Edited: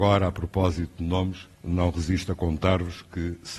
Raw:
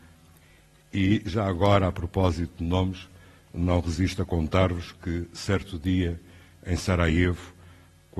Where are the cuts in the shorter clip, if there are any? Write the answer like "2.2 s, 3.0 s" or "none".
1.5 s